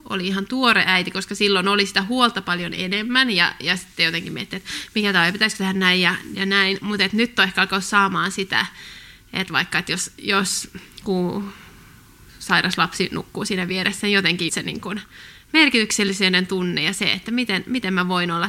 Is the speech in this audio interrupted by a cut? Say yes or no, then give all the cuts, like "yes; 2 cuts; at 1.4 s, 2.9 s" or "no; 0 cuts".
yes; 1 cut; at 14.5 s